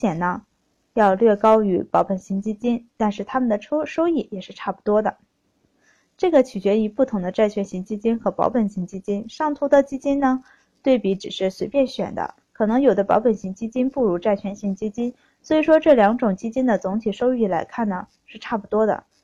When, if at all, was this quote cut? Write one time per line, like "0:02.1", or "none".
none

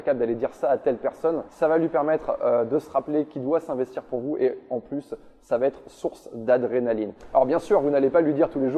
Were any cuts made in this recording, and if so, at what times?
0:01.5

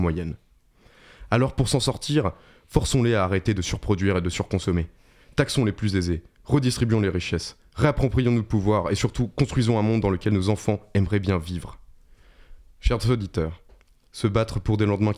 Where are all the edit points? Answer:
0:14.1

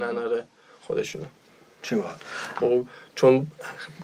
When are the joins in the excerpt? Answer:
0:02.6

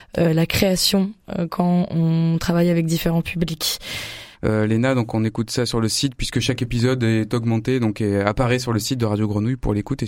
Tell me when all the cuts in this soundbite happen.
0:04.3

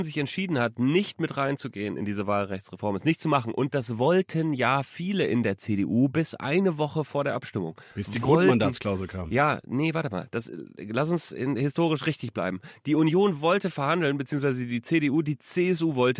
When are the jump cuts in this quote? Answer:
none

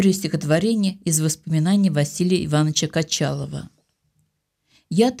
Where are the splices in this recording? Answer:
none

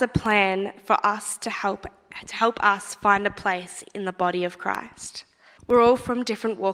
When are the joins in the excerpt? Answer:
0:05.6

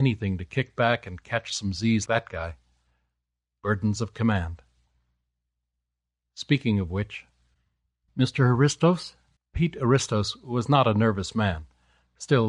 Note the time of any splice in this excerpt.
0:02.1
0:08.1
0:09.4

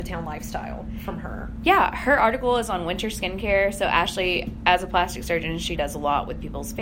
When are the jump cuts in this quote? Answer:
0:04.6
0:05.8

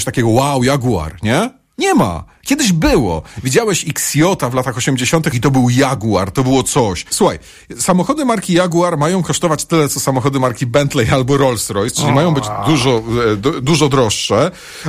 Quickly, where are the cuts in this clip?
0:05.3
0:07.1

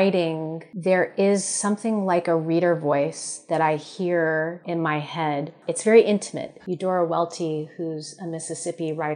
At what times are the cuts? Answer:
0:04.6
0:06.6

